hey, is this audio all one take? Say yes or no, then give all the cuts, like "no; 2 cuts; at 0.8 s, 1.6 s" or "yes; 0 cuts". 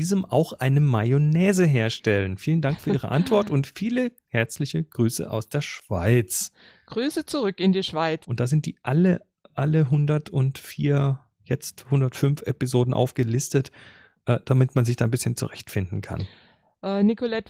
no; 1 cut; at 8.2 s